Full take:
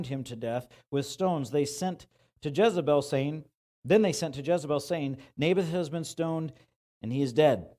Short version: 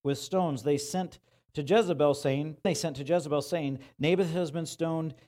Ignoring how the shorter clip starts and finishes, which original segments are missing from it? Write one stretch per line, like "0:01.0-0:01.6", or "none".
0:03.5-0:04.0